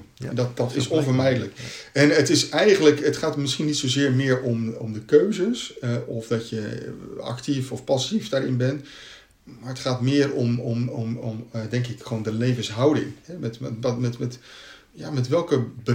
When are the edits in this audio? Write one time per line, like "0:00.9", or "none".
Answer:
none